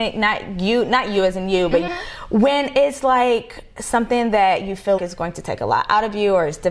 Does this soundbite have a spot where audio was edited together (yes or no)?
yes